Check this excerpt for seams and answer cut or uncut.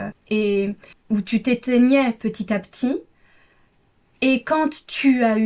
uncut